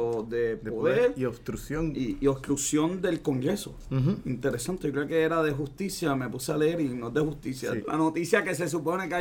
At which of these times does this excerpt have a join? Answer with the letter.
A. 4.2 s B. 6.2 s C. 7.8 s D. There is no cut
C